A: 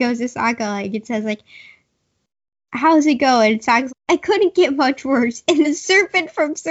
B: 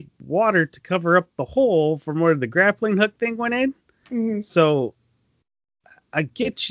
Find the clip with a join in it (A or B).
A